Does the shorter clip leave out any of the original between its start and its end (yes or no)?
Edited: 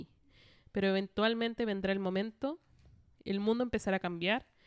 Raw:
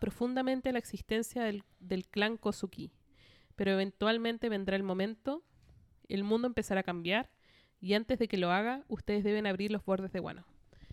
no